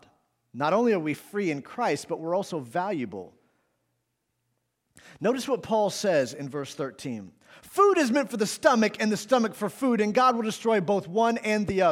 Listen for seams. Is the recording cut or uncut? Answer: uncut